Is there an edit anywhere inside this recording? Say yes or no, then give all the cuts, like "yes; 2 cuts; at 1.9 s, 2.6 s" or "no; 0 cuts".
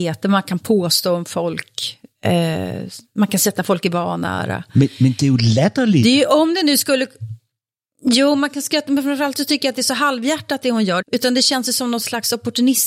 yes; 1 cut; at 11.0 s